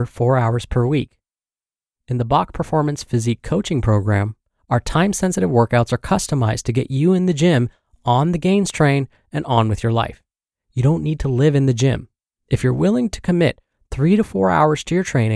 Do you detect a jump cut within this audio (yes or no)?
no